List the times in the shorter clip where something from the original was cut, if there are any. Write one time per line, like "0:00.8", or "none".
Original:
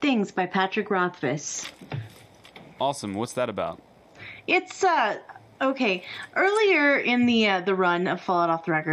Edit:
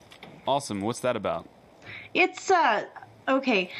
none